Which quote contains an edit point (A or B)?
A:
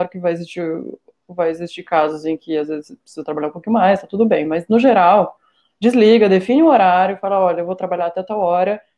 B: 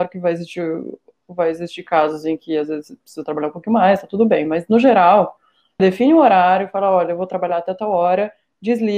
B